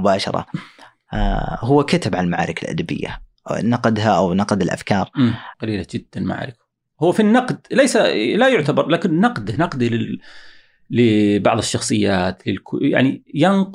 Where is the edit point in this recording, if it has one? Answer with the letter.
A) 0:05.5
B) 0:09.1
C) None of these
A